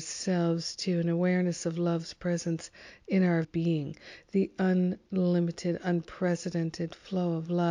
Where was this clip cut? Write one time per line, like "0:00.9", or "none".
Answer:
0:03.4